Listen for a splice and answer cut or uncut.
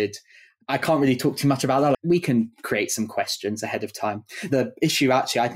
cut